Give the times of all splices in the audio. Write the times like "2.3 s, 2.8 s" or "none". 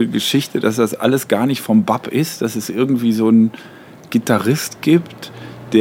none